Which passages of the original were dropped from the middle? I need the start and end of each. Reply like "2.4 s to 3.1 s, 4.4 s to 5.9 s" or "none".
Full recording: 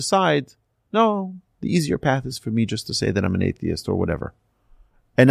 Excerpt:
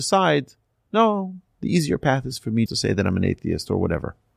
2.7 s to 2.8 s